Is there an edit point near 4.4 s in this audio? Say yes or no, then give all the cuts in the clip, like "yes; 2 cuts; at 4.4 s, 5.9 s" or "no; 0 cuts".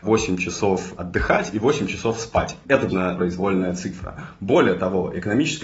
no; 1 cut; at 2.9 s